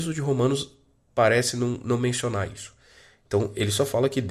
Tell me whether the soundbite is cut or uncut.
uncut